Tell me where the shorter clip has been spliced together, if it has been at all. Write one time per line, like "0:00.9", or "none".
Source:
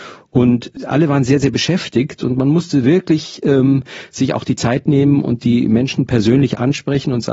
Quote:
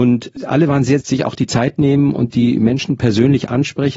0:01.0